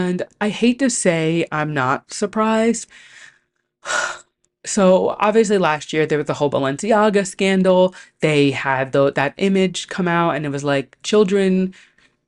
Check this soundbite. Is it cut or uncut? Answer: cut